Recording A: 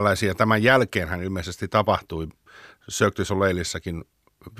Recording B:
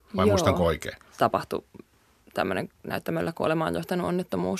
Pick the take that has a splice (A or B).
B